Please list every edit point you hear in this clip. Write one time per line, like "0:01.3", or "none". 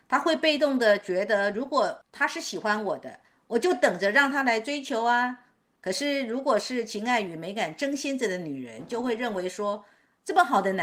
none